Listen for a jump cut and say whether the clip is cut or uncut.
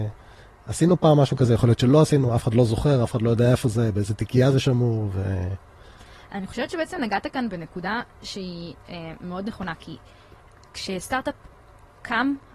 uncut